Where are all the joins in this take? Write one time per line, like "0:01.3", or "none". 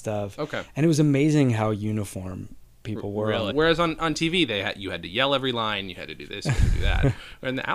0:03.5